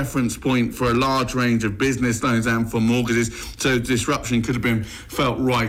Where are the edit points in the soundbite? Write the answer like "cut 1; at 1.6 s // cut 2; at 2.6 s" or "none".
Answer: none